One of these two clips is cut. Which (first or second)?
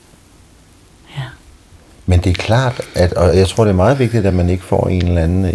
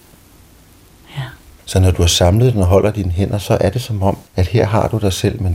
second